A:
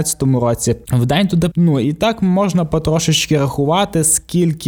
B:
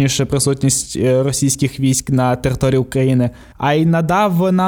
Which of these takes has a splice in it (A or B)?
A